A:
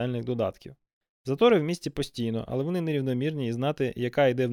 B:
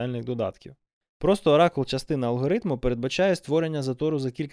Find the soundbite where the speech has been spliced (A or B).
B